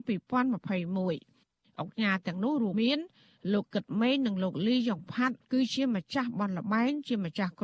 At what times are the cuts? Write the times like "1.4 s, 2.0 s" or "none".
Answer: 2.7 s, 5.4 s